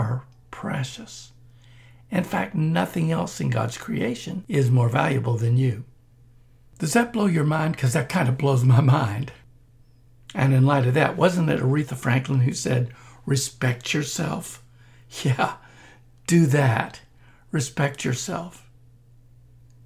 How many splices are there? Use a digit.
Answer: 0